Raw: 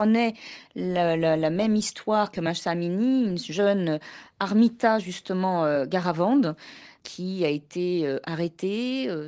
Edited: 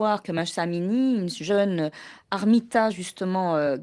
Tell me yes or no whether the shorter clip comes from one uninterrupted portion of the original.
yes